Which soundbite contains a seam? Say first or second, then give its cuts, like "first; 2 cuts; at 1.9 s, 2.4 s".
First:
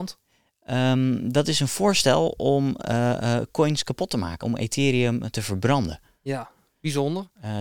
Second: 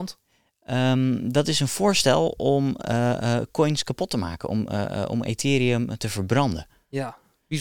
first; 1 cut; at 4.4 s